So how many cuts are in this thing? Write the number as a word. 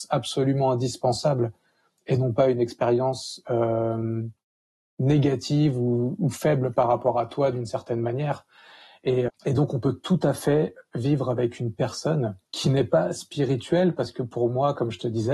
two